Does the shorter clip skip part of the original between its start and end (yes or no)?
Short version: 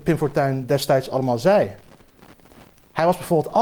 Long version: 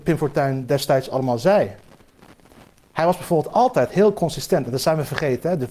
no